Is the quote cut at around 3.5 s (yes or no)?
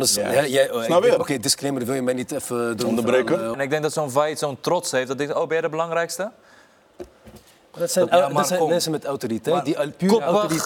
yes